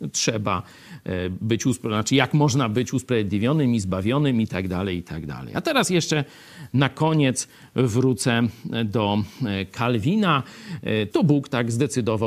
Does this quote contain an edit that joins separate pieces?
yes; 1 cut; at 11.1 s

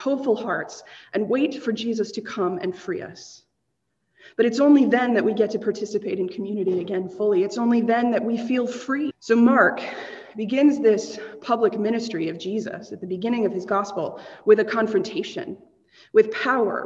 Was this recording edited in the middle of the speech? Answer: yes; 1 cut; at 9.1 s

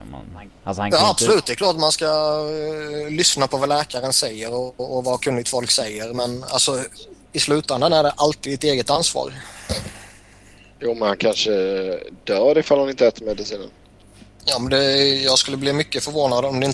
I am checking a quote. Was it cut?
no; 0 cuts

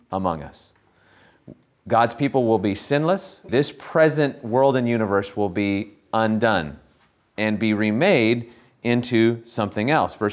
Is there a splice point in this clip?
yes; 1 cut; at 3.5 s

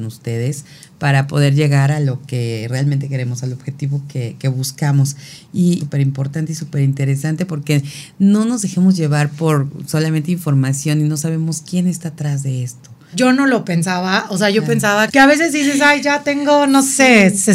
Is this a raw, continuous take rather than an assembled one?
no; 3 cuts; at 5.8 s, 13.1 s, 15.1 s

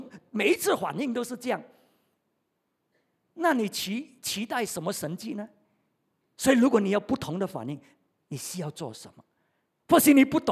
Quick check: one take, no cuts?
no; 1 cut; at 6.2 s

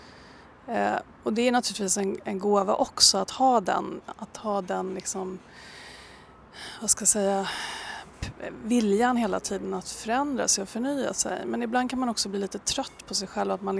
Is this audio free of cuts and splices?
yes; 0 cuts

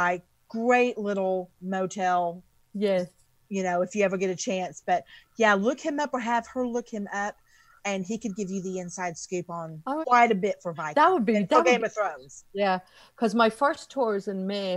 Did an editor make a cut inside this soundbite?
yes; 1 cut; at 10.0 s

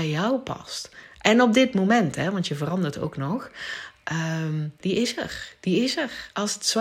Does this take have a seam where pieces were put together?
yes; 1 cut; at 4.8 s

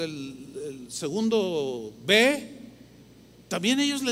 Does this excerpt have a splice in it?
no; 0 cuts

